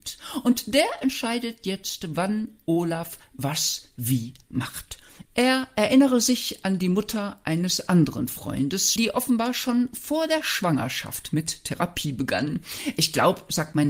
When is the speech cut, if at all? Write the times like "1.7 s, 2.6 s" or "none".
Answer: 5.2 s, 9.0 s